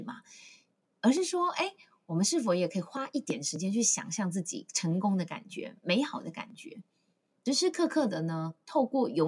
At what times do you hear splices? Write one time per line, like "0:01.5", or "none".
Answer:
0:07.5